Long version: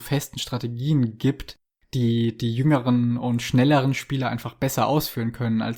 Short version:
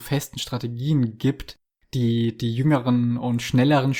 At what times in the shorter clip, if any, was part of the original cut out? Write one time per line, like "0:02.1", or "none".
none

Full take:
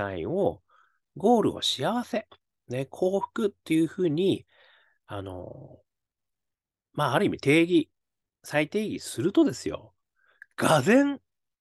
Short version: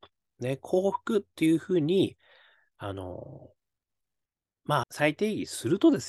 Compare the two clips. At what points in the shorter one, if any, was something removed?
0:04.8

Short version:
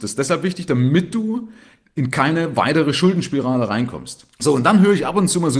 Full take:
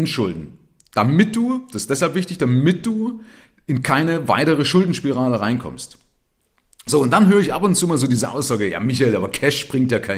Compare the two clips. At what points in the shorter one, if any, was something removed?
0:04.3

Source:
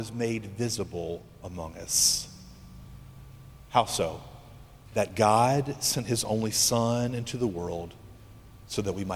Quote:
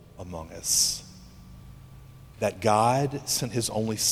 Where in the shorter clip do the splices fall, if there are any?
0:02.3

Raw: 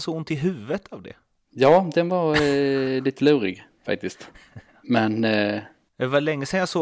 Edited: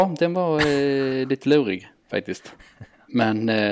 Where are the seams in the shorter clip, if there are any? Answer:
none

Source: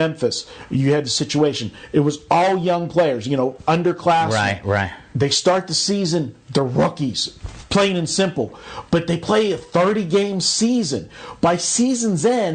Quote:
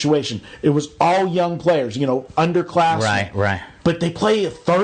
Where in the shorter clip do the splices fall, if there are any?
0:03.8

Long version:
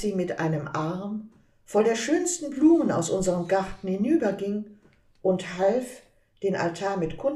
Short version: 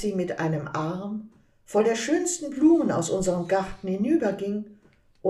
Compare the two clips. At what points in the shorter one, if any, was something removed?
none

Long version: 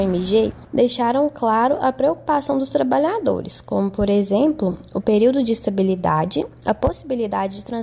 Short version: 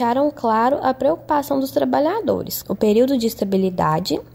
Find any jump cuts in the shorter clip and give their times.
0:02.6

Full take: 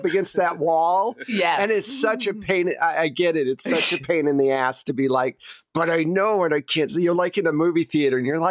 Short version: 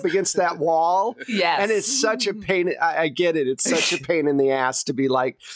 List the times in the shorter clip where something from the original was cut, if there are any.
none

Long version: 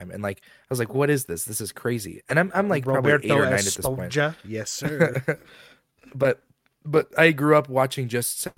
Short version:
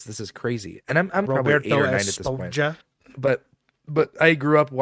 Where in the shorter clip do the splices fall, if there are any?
0:01.3
0:02.8

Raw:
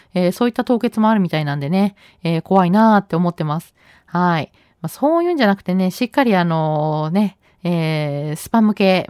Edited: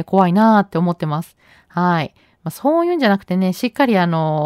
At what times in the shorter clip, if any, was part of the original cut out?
none

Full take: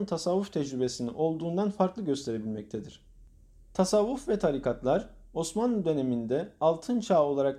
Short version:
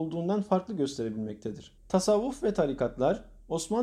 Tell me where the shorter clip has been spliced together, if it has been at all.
0:01.8

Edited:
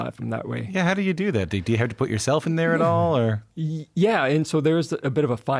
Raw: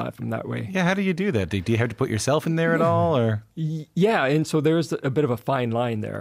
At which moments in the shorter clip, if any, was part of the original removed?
none

